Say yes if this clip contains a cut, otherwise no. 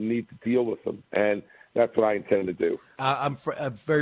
yes